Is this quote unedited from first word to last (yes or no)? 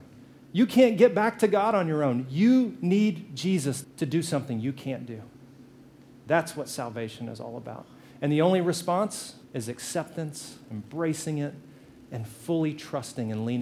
no